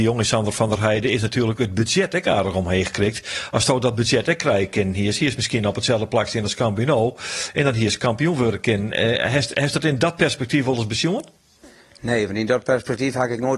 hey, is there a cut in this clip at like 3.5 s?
no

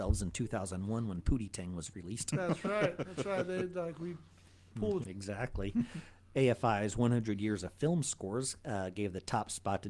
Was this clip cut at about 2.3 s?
no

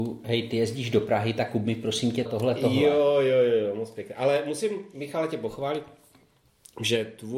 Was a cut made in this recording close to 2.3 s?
yes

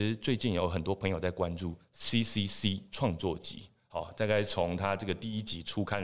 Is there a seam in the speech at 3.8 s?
yes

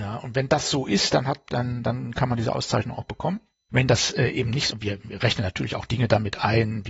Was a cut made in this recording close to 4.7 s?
yes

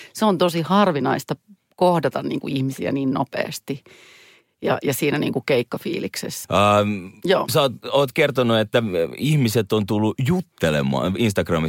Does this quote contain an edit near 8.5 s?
no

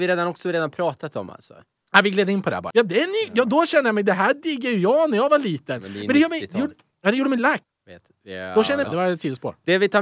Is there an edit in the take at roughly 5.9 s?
no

